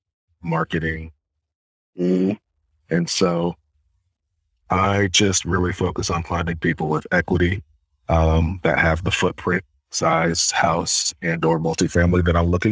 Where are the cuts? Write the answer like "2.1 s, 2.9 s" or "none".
none